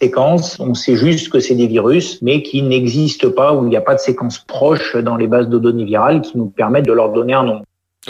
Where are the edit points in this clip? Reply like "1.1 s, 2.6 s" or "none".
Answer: none